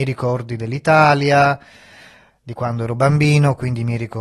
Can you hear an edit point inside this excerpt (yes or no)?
no